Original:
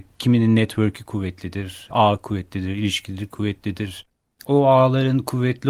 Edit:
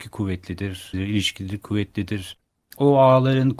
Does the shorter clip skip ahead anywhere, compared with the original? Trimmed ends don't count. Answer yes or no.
yes